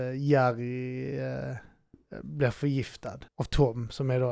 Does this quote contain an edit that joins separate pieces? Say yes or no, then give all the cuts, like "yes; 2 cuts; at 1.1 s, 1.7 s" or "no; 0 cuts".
yes; 1 cut; at 3.3 s